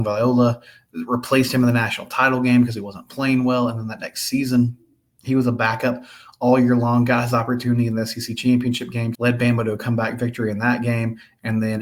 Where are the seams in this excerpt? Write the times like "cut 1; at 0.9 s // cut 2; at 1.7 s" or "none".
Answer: cut 1; at 9.1 s